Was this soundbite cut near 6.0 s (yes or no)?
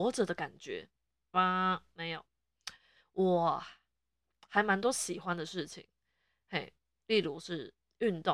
no